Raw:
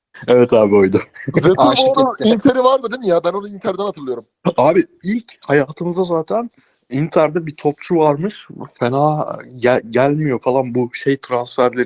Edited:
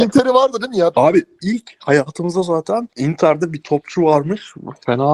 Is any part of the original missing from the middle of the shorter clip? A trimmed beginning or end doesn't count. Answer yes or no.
yes